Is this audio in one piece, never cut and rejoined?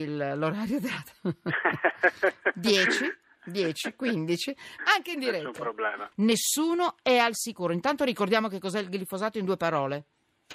no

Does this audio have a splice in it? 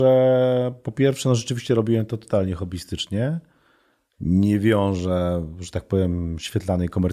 no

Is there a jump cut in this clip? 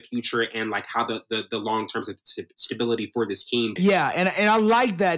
yes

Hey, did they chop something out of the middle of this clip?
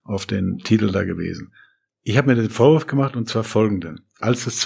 no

